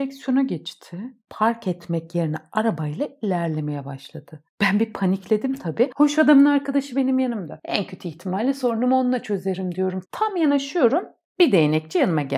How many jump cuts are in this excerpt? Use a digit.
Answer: 1